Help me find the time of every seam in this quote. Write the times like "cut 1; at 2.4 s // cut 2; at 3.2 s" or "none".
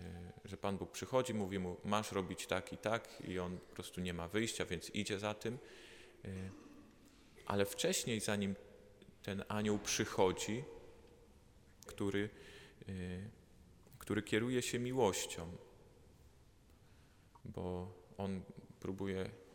cut 1; at 11.9 s // cut 2; at 17.4 s